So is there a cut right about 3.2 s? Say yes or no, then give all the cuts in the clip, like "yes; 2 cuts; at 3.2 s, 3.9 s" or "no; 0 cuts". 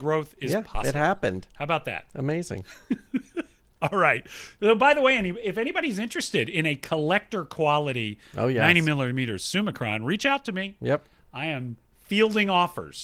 no; 0 cuts